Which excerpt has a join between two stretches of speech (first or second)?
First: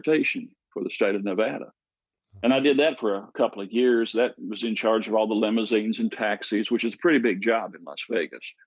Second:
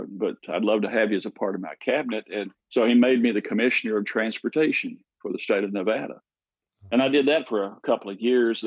second